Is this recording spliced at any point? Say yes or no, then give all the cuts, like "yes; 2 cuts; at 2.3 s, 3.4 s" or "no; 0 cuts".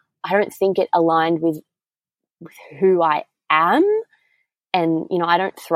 no; 0 cuts